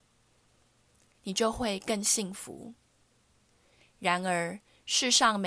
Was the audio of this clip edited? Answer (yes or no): yes